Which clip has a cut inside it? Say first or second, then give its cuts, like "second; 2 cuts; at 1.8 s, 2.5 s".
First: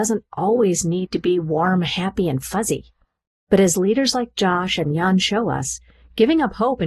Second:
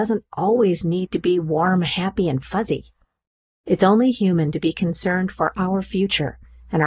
first; 1 cut; at 3.4 s